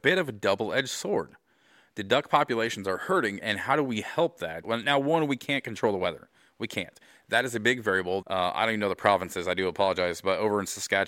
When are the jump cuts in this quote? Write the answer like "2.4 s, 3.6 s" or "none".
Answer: 3.4 s, 4.6 s, 8.2 s